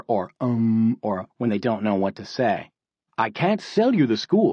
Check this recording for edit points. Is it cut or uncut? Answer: cut